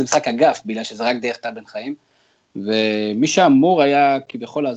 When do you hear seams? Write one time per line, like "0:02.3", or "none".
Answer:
0:02.4

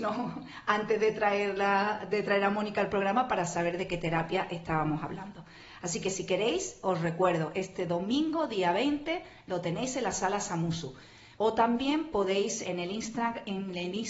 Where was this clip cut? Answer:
0:11.4
0:12.6

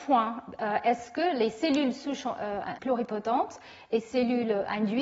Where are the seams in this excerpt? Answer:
0:02.8

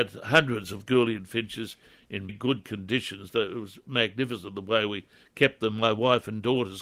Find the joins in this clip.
0:02.3

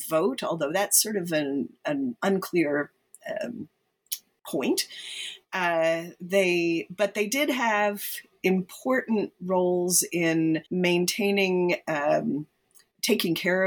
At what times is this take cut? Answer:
0:10.7

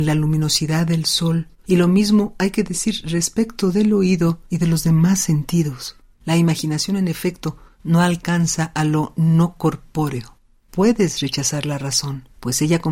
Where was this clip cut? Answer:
0:06.1

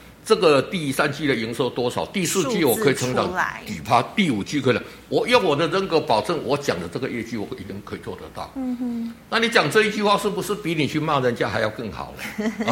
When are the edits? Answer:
none

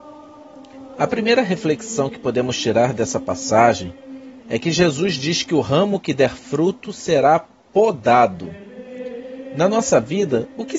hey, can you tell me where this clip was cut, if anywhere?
0:00.9
0:04.4

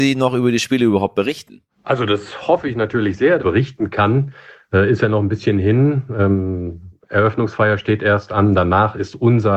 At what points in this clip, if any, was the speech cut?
0:03.4

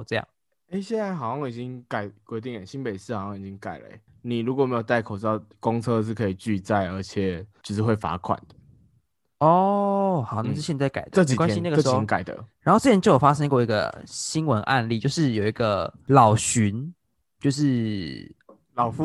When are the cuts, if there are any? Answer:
0:12.5

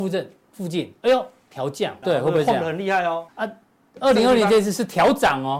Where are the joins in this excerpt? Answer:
0:02.0
0:03.3

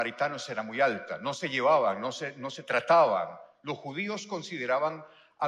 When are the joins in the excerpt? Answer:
none

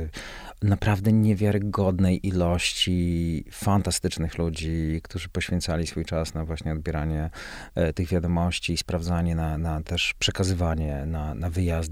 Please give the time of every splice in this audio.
none

